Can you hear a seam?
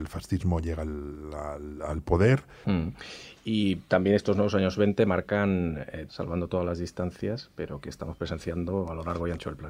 yes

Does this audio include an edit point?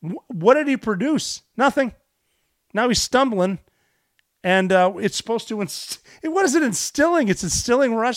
no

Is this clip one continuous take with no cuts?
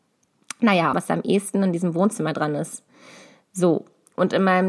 no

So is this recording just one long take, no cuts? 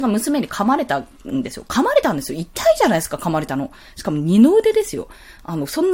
yes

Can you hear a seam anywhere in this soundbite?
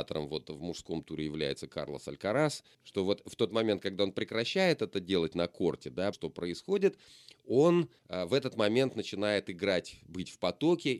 yes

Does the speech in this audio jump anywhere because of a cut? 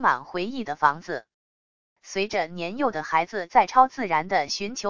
yes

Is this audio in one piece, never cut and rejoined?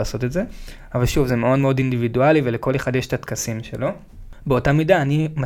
yes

